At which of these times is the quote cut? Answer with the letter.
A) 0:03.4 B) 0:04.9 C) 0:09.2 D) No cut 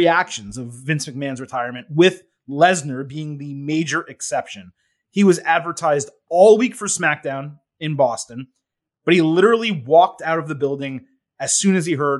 D